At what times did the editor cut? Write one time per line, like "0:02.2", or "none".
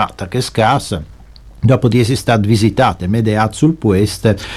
none